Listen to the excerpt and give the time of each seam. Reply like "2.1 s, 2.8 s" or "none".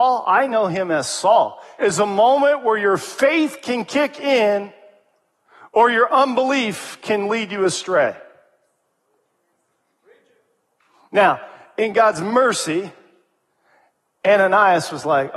1.8 s